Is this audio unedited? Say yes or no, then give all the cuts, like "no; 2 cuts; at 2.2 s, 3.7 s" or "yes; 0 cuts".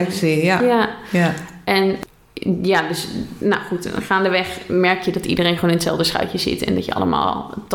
yes; 0 cuts